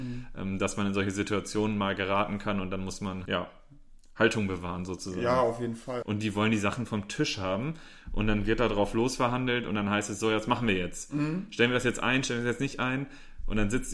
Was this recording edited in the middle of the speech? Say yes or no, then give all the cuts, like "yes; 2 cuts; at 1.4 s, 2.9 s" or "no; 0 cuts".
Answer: yes; 2 cuts; at 3.3 s, 6.0 s